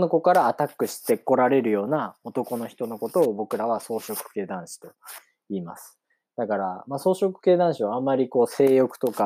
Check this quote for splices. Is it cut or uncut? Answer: uncut